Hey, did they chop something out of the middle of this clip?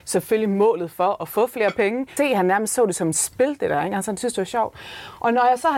yes; 1 cut; at 2.2 s

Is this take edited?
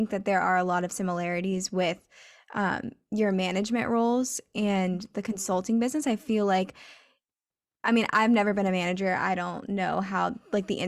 no; 0 cuts

